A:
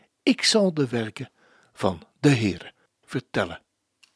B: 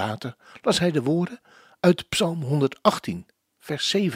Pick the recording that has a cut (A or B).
A